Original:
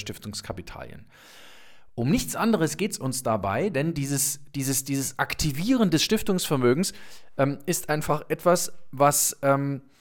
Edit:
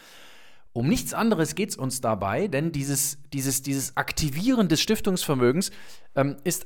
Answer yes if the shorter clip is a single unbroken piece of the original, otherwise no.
yes